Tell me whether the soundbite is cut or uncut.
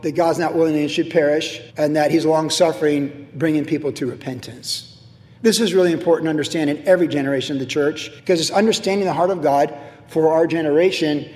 cut